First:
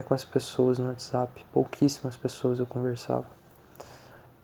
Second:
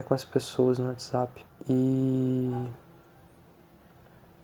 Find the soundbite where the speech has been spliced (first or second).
second